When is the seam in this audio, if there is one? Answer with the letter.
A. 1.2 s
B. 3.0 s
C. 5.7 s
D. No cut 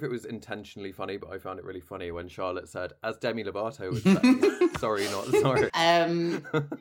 C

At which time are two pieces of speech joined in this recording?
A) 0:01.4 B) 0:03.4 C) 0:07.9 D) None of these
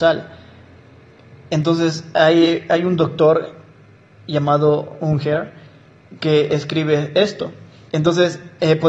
C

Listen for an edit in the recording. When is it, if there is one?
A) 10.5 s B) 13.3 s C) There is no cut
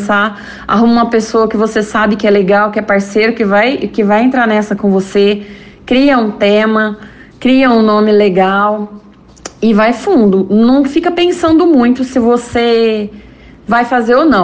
C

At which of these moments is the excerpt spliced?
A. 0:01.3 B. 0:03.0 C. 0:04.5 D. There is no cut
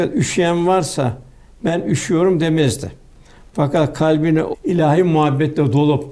C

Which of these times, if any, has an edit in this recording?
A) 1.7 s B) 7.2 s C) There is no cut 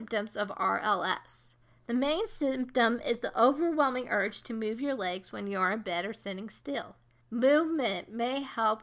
B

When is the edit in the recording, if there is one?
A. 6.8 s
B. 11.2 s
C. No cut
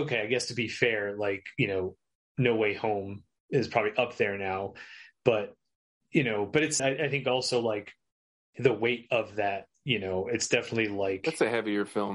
A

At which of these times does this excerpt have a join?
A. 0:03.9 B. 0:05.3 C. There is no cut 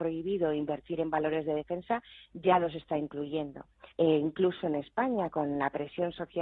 A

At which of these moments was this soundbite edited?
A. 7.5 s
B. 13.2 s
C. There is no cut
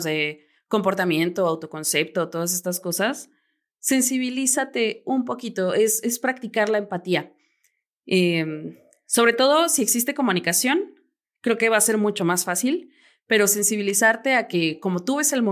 C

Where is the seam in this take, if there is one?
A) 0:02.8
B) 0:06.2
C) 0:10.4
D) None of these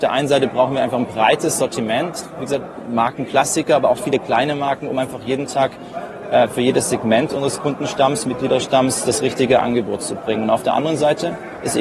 D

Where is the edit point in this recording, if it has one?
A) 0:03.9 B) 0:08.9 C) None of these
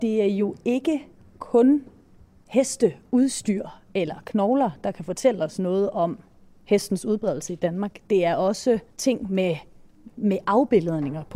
B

